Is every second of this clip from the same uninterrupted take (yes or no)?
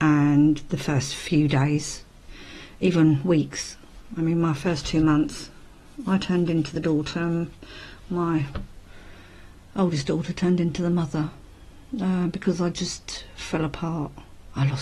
yes